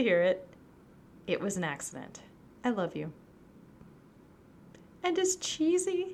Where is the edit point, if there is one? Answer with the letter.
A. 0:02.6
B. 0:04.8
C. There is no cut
A